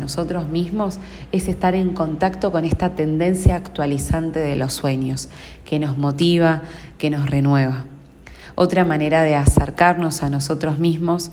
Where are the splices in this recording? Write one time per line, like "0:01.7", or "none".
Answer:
none